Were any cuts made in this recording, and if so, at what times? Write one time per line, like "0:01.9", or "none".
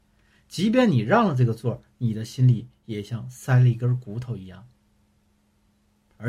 none